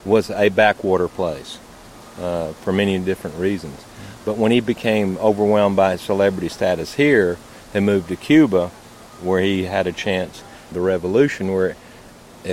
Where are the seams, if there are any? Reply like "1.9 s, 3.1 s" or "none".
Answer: 10.7 s